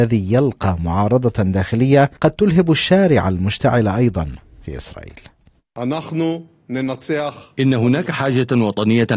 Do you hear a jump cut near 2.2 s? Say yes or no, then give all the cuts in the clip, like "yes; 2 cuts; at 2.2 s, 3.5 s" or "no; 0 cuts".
yes; 1 cut; at 2.2 s